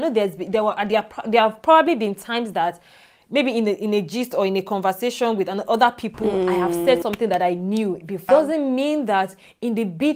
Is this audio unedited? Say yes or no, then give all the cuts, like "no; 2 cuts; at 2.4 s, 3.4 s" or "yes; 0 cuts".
no; 1 cut; at 8.3 s